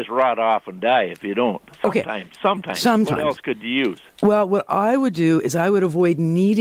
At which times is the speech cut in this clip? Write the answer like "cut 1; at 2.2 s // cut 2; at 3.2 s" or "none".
none